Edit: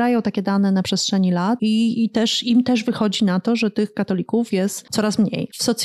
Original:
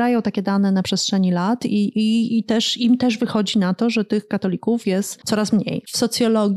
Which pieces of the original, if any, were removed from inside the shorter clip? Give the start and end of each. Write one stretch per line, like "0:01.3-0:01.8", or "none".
0:01.6-0:01.9